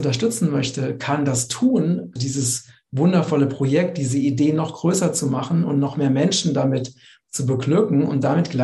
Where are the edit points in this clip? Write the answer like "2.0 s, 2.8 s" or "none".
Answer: 2.2 s